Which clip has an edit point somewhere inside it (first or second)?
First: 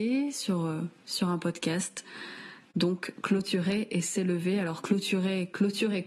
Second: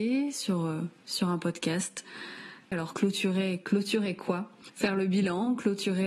second